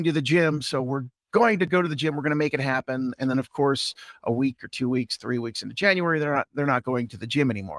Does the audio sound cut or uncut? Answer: uncut